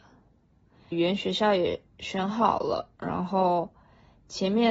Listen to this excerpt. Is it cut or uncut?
cut